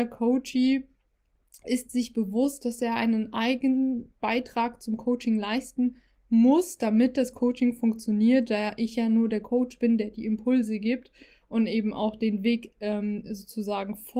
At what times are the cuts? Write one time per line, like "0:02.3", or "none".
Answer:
none